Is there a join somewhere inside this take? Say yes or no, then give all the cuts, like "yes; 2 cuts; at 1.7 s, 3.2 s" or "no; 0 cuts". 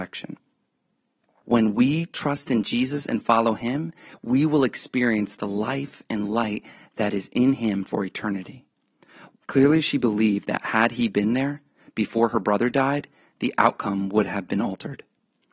yes; 2 cuts; at 1.4 s, 9.3 s